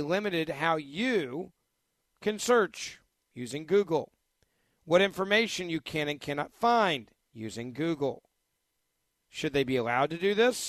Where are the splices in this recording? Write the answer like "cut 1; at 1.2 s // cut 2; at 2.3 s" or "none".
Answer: cut 1; at 9.2 s

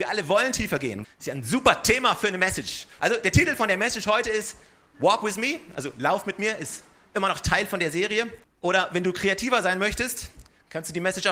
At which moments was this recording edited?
cut 1; at 1.0 s // cut 2; at 3.0 s // cut 3; at 8.4 s

